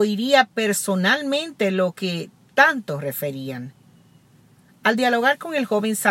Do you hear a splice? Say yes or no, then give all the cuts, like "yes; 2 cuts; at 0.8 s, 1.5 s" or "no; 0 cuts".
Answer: no; 0 cuts